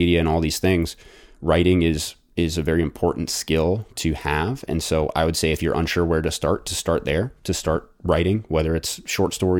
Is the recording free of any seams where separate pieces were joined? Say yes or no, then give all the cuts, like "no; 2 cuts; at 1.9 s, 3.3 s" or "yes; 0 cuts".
yes; 0 cuts